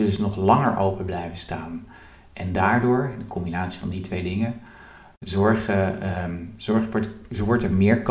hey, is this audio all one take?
yes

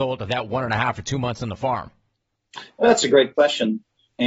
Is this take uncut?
yes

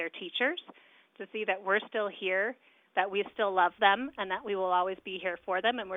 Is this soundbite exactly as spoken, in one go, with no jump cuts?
yes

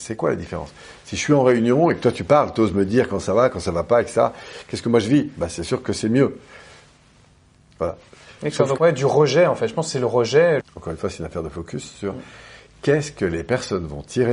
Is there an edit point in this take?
yes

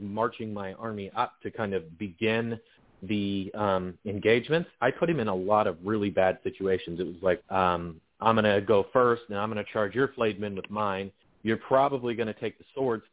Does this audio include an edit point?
yes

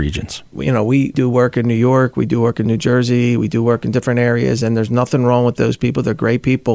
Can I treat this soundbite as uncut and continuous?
yes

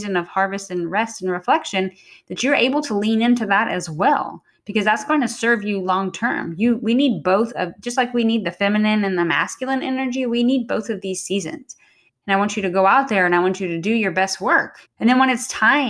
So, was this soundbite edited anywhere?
yes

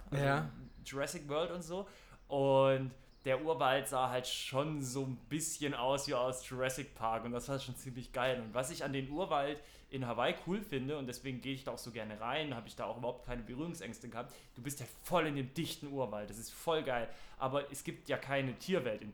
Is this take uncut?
yes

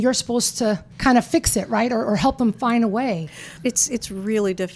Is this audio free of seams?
no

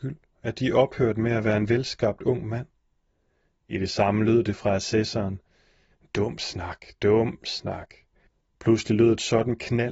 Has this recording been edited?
no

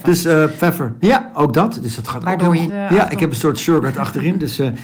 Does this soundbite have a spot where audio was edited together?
yes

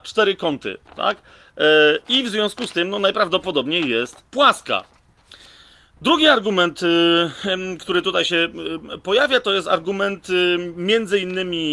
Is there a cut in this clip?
yes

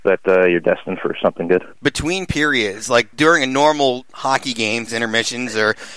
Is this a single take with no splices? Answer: no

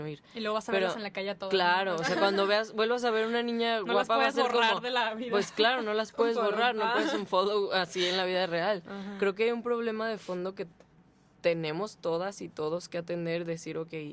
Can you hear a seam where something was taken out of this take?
no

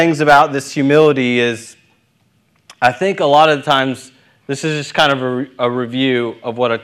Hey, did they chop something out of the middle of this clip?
no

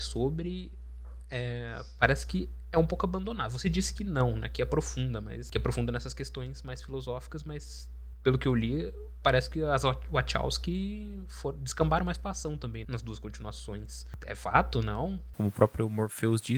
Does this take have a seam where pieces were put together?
yes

